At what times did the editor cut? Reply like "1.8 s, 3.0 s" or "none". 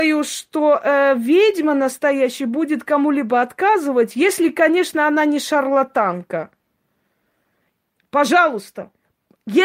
none